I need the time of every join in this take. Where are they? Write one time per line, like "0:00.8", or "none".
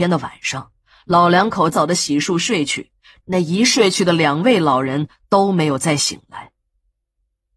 0:01.7
0:03.2

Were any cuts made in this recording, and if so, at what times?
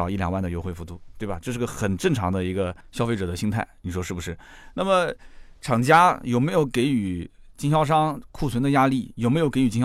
none

